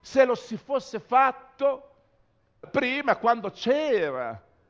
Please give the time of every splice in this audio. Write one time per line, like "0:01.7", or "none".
0:02.6